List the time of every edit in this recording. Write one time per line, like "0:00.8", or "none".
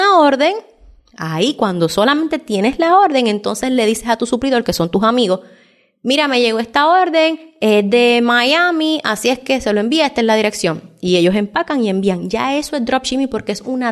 none